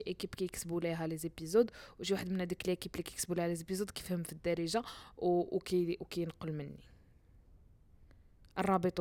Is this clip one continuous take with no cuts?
yes; 0 cuts

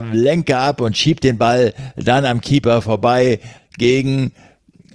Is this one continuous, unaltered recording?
no; 1 cut; at 3.6 s

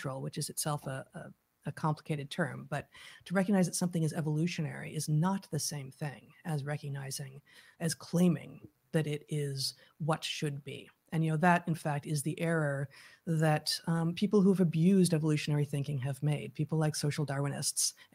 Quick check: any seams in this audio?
no; 0 cuts

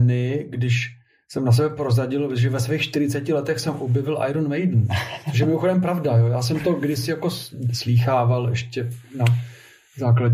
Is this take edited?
no; 0 cuts

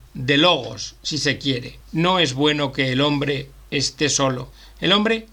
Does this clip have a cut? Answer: yes; 1 cut; at 1.8 s

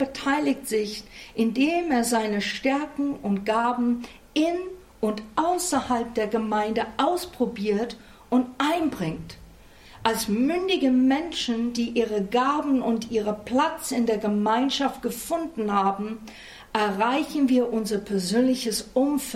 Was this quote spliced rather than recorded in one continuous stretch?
no; 0 cuts

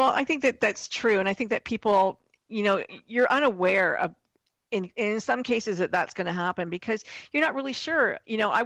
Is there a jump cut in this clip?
no; 0 cuts

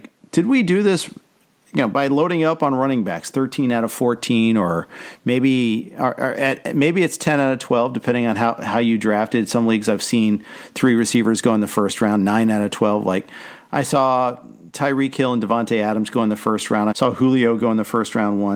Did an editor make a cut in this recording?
yes; 1 cut; at 16.9 s

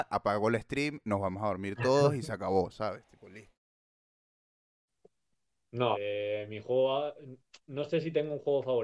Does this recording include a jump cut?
yes; 1 cut; at 5.9 s

